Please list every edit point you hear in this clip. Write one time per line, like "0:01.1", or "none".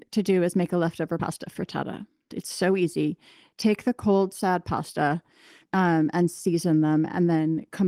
0:02.3
0:05.7